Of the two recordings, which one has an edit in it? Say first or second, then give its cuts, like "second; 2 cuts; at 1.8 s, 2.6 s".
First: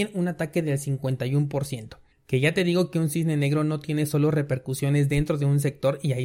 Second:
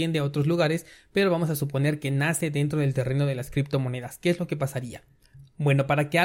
first; 1 cut; at 2.1 s